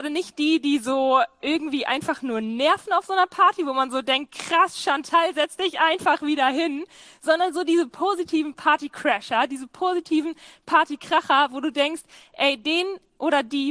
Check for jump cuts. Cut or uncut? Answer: uncut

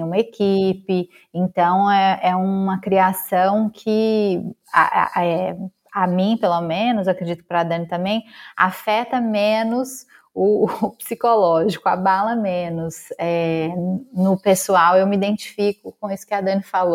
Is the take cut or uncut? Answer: uncut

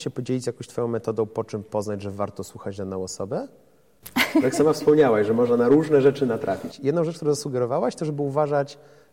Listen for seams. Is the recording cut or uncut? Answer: uncut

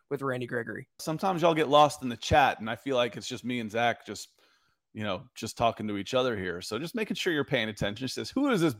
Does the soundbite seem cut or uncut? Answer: cut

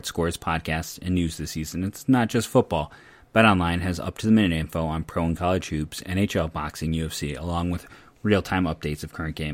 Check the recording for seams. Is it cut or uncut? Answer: uncut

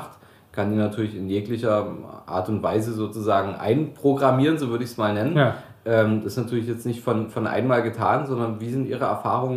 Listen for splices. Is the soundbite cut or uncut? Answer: uncut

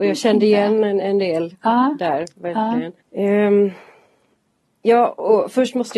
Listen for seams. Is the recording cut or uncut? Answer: cut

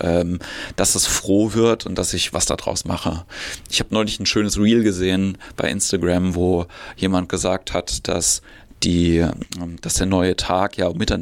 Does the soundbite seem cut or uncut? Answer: uncut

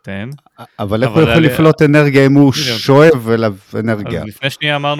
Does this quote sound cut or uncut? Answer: uncut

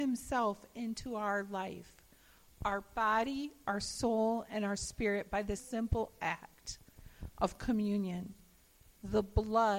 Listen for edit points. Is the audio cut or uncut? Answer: cut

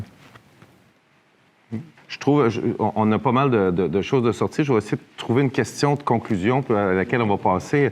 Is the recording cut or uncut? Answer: cut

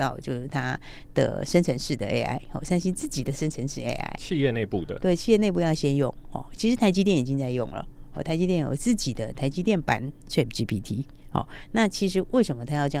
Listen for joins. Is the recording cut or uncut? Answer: uncut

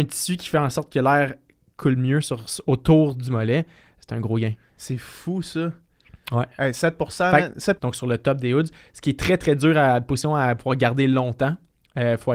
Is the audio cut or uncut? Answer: cut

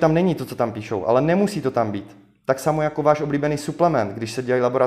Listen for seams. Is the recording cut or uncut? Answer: uncut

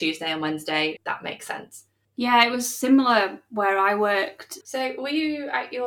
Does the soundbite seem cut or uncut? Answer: cut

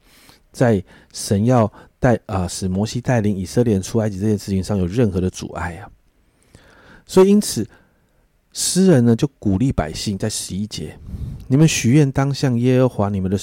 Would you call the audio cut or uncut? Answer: uncut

